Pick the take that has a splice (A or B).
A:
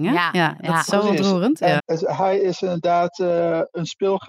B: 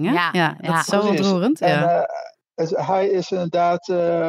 A